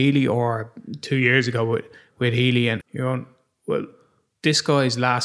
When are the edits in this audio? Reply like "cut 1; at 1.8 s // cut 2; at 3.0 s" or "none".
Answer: cut 1; at 2.8 s